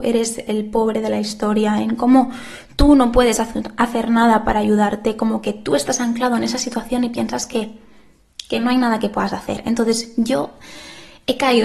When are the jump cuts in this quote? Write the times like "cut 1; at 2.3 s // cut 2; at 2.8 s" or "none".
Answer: none

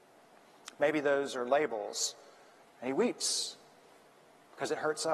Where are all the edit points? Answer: cut 1; at 2.6 s

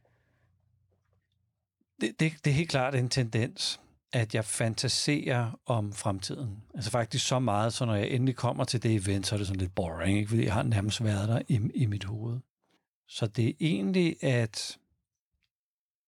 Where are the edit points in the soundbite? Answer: none

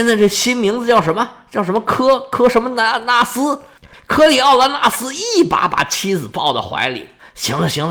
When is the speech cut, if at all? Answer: cut 1; at 3.9 s

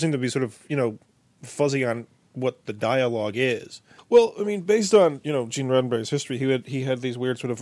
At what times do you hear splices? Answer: cut 1; at 4.0 s

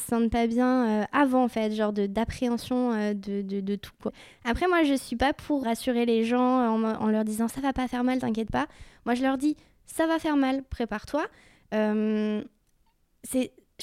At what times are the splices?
cut 1; at 5.6 s

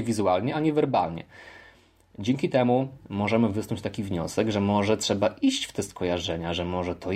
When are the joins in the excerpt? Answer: none

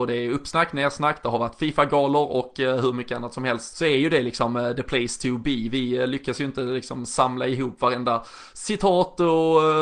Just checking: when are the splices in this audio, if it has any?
cut 1; at 3.7 s

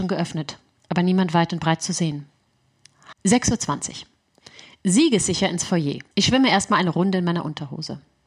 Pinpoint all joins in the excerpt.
cut 1; at 3.1 s // cut 2; at 6.1 s

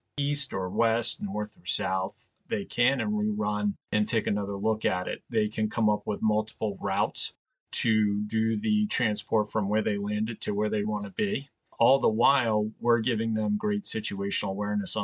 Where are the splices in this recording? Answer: cut 1; at 3.8 s // cut 2; at 10.8 s

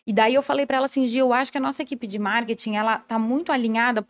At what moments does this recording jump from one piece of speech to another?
none

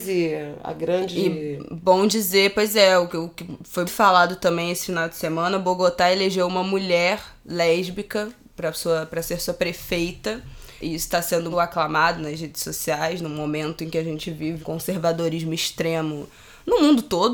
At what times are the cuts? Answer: cut 1; at 3.8 s // cut 2; at 11.5 s // cut 3; at 14.6 s

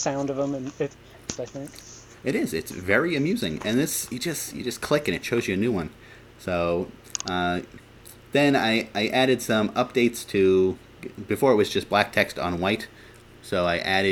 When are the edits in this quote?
cut 1; at 1.4 s

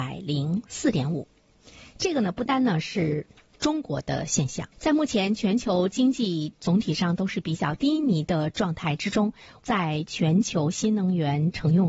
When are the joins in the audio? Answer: cut 1; at 2.5 s // cut 2; at 4.7 s

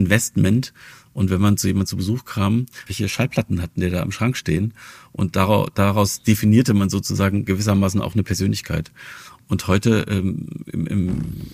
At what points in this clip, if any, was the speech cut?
cut 1; at 2.9 s

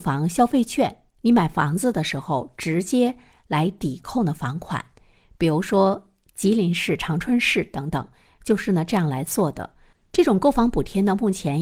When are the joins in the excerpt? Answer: cut 1; at 9.9 s

